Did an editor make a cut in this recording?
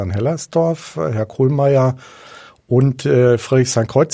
no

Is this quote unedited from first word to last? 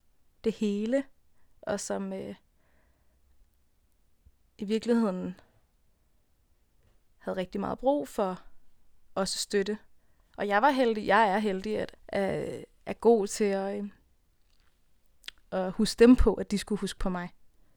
no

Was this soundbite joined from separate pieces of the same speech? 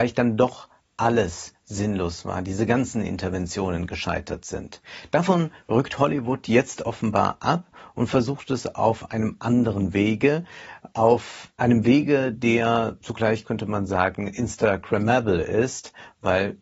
yes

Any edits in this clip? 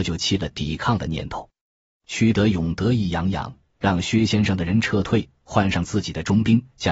no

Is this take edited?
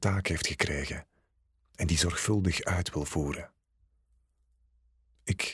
no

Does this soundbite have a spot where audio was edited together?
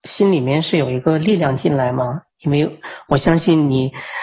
no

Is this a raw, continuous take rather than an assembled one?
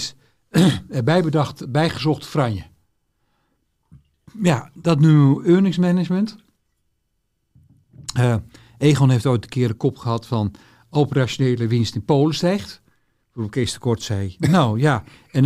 yes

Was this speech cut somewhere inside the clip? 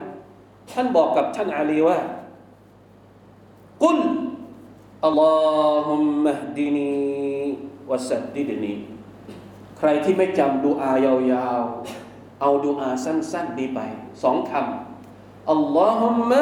yes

